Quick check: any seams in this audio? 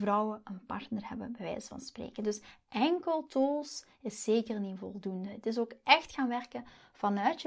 no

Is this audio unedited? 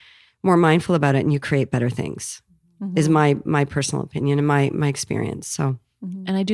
yes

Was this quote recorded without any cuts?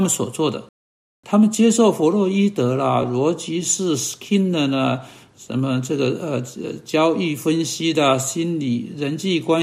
yes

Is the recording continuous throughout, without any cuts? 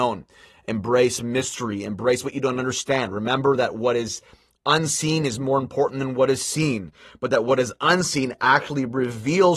yes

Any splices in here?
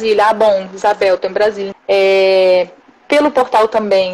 yes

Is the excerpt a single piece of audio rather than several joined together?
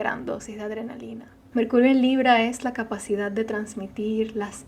no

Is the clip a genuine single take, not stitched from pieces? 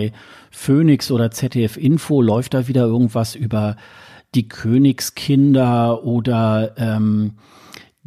yes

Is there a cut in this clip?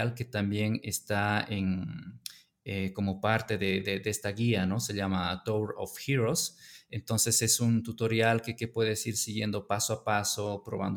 no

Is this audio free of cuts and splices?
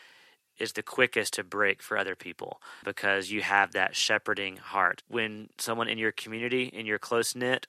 no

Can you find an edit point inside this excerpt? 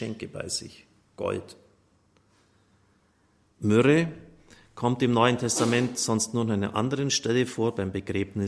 no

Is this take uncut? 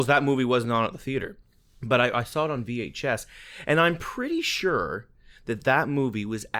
yes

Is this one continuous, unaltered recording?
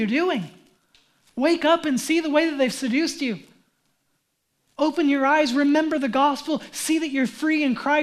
yes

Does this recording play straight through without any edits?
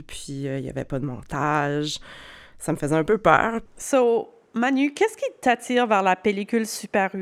no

